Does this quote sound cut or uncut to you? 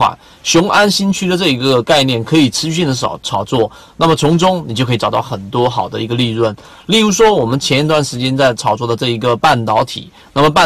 uncut